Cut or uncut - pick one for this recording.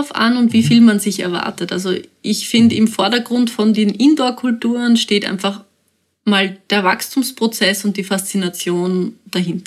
uncut